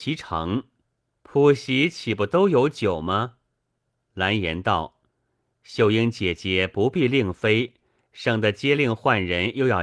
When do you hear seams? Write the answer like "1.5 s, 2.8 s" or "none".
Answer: none